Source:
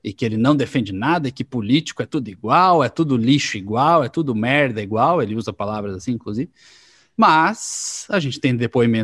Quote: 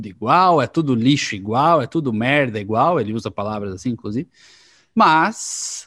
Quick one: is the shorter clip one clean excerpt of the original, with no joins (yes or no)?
yes